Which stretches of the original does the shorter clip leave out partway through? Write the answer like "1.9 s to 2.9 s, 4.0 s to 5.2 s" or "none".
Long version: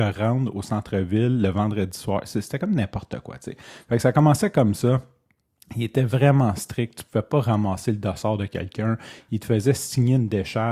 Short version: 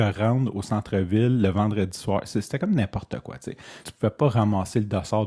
3.8 s to 7.0 s